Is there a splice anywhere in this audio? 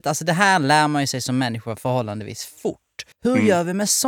yes; 1 cut; at 3.1 s

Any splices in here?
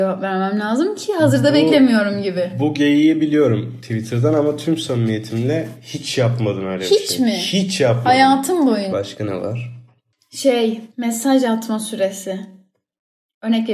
yes; 2 cuts; at 8.9 s, 10.9 s

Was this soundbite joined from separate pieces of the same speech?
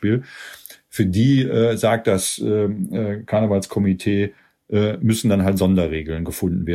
no; 0 cuts

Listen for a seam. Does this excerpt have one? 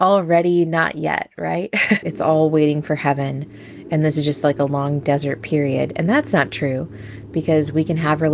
yes; 1 cut; at 2.0 s

